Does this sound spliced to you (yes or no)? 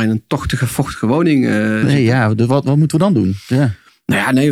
no